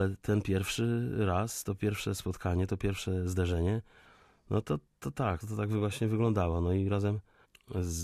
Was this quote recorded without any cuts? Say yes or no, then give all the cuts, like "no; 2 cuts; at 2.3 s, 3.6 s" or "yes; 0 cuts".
no; 1 cut; at 5.4 s